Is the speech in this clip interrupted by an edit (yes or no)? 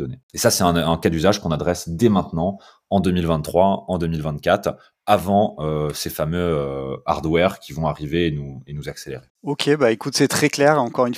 no